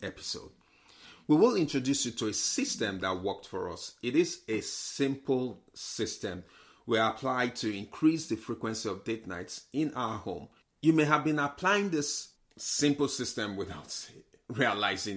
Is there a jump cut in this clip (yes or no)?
no